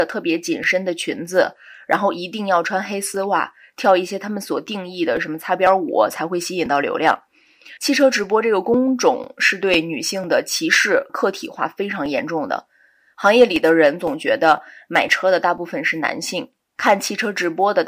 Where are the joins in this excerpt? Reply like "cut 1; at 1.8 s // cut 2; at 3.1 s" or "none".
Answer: cut 1; at 7.8 s // cut 2; at 11.1 s